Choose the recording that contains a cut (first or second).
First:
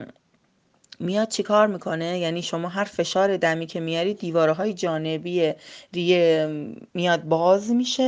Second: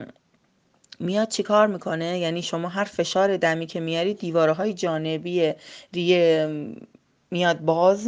first